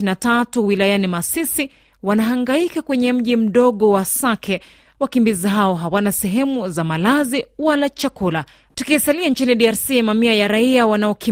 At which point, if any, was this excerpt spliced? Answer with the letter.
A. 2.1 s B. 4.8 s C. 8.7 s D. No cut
C